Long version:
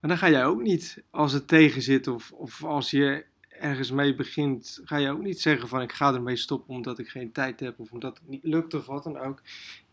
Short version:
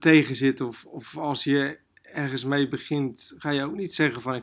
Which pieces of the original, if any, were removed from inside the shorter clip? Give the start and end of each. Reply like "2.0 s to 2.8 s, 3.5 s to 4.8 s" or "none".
none